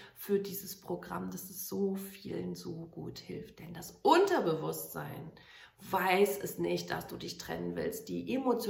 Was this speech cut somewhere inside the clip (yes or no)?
no